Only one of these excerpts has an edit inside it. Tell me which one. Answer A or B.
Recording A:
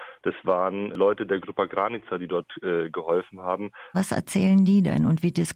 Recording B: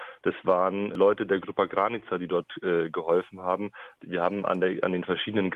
A